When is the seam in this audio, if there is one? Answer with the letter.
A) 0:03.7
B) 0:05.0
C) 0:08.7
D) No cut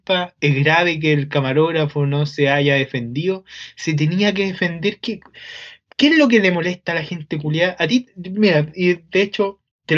D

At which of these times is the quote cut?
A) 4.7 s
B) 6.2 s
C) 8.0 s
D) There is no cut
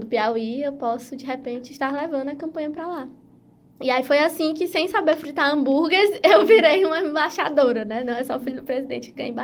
D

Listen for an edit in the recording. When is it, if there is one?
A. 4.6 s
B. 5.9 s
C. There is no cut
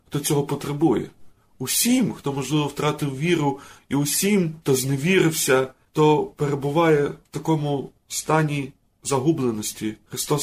B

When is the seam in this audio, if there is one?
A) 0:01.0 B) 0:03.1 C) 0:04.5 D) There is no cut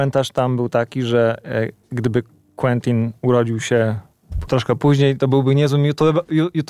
C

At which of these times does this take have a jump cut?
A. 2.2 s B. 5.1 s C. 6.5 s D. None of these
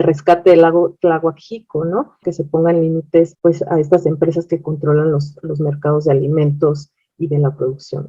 A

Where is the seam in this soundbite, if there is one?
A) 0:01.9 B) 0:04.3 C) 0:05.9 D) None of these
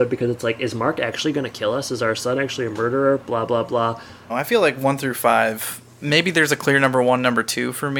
B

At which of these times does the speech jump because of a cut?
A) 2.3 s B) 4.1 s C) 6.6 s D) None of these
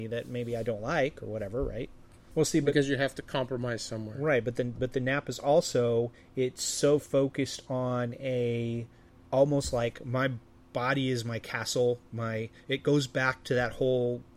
A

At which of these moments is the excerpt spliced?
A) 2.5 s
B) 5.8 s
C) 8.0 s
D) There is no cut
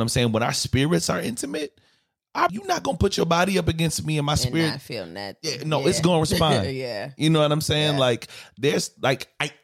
A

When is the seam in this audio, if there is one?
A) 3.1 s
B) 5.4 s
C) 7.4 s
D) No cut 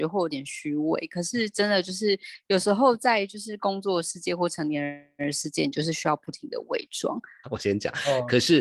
C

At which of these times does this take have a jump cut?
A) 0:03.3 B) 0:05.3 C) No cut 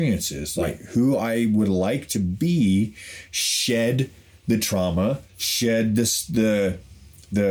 B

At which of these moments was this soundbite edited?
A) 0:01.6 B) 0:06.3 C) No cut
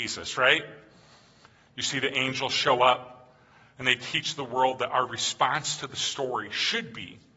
A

